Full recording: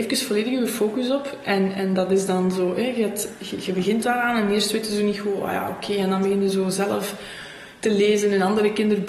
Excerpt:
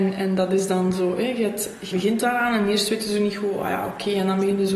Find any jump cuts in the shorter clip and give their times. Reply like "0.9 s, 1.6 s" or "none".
1.9 s